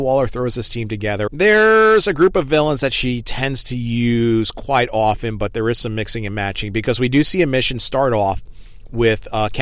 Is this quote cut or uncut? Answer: cut